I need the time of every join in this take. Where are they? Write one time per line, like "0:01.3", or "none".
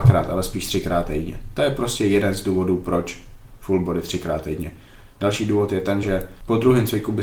0:06.0